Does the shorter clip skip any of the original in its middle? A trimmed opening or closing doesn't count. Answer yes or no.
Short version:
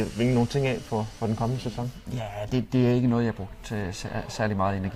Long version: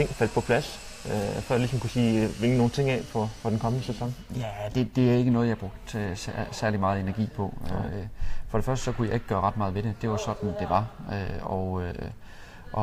no